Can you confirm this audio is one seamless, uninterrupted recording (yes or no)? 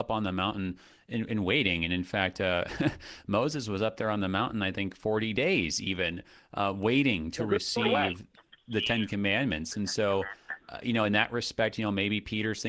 yes